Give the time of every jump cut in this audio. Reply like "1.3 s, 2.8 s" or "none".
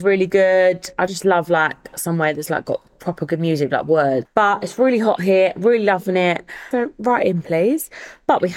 4.2 s, 6.7 s